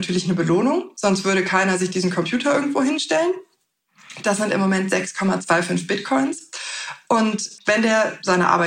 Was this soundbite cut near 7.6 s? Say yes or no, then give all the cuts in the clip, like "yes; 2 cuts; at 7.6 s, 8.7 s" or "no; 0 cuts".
yes; 1 cut; at 7.6 s